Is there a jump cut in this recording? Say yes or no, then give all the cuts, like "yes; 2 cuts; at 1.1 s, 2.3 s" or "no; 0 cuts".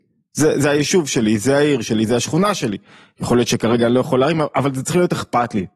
no; 0 cuts